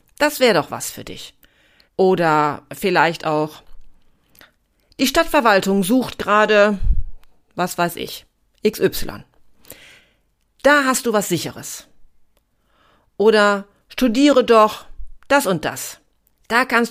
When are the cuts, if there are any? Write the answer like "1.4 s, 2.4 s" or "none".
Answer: 1.9 s